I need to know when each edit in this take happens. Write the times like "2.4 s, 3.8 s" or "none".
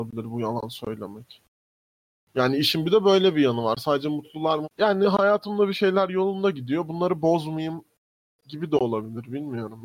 4.6 s